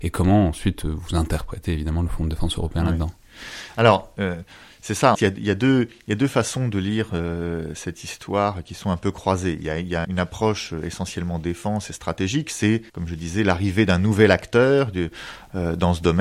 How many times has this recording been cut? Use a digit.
3